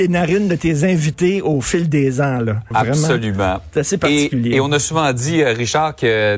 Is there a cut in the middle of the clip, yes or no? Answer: yes